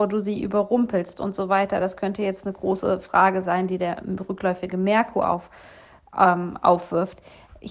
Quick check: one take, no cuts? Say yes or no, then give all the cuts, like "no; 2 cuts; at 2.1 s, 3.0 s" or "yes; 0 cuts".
yes; 0 cuts